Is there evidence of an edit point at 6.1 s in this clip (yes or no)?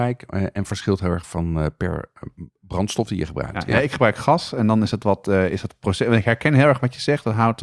no